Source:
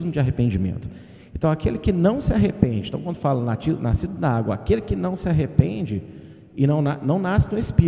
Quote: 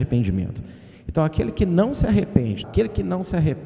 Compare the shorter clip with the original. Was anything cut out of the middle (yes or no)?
yes